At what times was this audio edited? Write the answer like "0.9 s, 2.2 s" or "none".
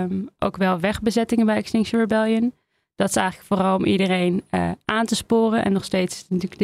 none